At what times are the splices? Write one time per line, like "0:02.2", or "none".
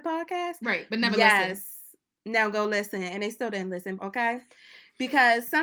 0:04.0